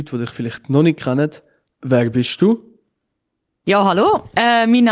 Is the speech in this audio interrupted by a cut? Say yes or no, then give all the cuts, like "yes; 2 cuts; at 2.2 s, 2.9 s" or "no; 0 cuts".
no; 0 cuts